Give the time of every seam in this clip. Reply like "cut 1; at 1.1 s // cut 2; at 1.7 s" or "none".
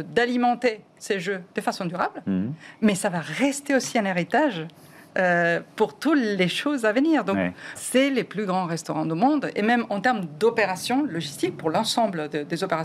cut 1; at 7.8 s